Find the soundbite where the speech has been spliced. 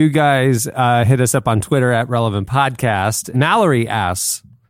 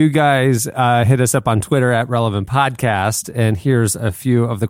first; 1 cut; at 3.3 s

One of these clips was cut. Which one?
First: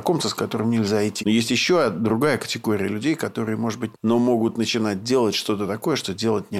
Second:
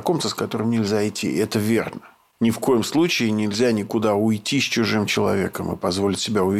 first; 2 cuts; at 1.2 s, 3.9 s

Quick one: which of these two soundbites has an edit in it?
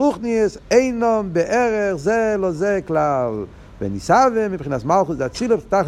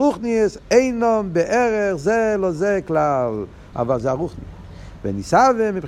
second; 2 cuts; at 3.7 s, 5.0 s

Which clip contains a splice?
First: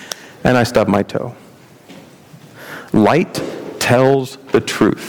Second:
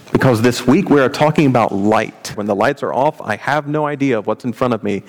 second; 1 cut; at 2.3 s

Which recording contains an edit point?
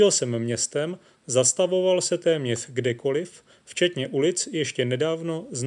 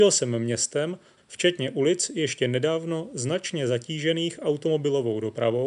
second; 1 cut; at 1.2 s

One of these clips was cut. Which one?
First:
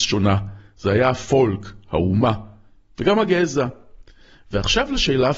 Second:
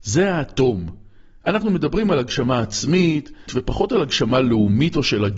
second; 2 cuts; at 1.4 s, 3.5 s

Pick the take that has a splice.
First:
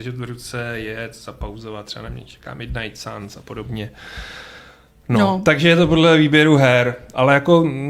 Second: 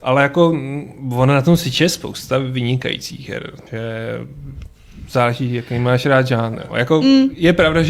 second; 2 cuts; at 3.7 s, 6.7 s

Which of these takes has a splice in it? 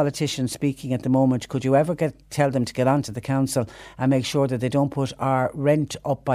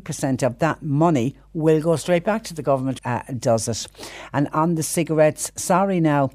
second; 1 cut; at 3.0 s

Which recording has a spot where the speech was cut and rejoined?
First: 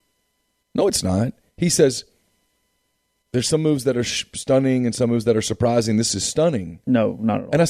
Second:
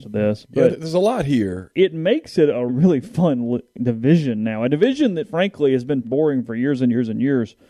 second; 2 cuts; at 2.7 s, 6.0 s

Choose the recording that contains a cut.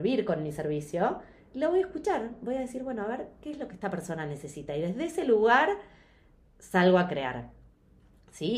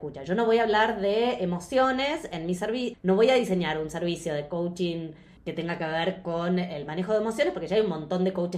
second; 2 cuts; at 2.9 s, 5.4 s

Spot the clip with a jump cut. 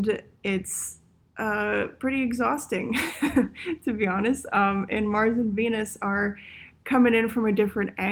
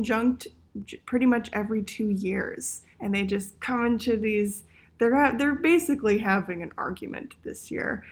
second; 1 cut; at 2.9 s

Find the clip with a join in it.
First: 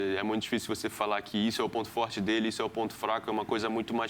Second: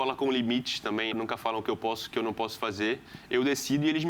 second; 1 cut; at 1.1 s

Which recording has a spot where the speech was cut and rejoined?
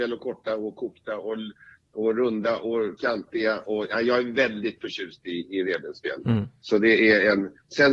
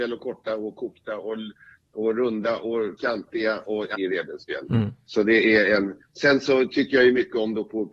second; 1 cut; at 3.9 s

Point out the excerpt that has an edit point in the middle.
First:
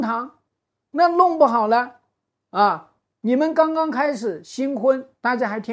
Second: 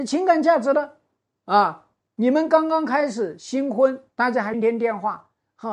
second; 2 cuts; at 1.4 s, 4.5 s

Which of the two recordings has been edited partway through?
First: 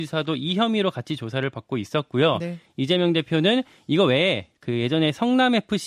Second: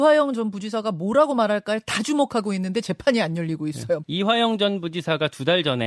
second; 1 cut; at 4.0 s

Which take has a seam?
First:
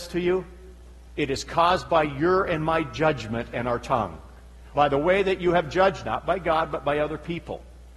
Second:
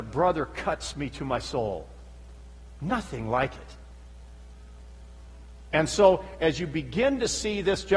first; 3 cuts; at 1.1 s, 4.7 s, 6.0 s

